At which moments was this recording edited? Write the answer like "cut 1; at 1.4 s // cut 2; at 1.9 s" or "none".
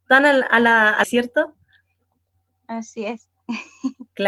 cut 1; at 1.0 s